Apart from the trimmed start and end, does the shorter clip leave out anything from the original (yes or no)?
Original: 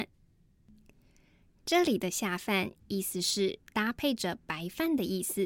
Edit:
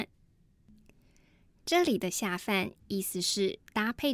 no